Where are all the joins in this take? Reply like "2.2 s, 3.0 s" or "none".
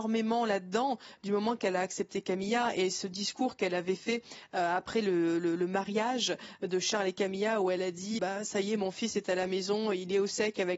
8.2 s